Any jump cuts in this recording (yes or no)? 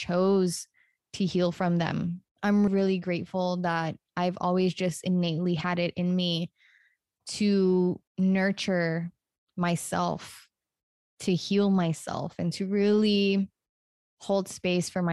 yes